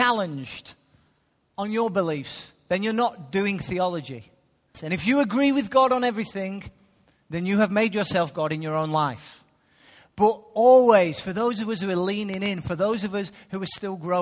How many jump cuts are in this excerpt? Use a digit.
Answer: 1